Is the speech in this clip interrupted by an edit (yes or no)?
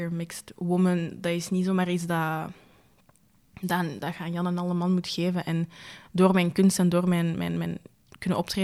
no